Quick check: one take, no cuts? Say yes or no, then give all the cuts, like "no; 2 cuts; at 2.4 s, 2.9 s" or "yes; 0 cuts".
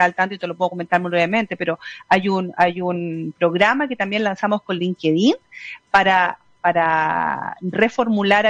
yes; 0 cuts